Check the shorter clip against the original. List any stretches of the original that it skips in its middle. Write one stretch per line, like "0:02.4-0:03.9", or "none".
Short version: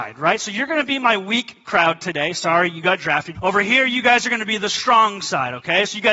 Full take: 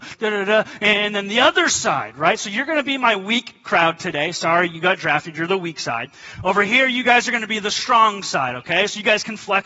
0:05.3-0:06.4